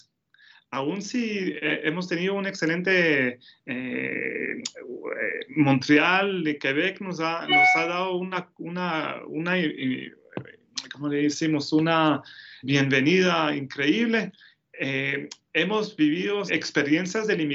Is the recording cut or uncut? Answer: cut